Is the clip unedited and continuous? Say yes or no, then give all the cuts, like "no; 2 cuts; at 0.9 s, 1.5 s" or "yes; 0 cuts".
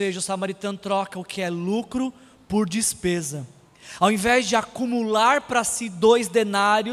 yes; 0 cuts